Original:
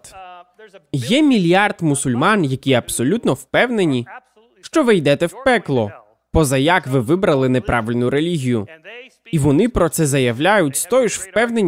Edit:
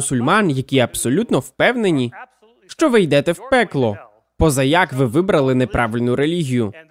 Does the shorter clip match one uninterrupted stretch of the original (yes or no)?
yes